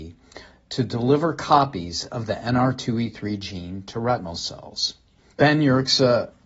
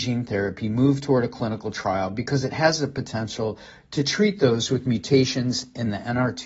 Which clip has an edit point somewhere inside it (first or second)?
first